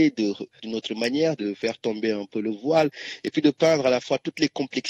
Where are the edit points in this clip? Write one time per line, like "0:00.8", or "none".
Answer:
0:01.4